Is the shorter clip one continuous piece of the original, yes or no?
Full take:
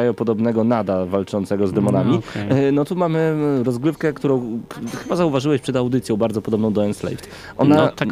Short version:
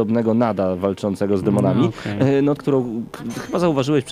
no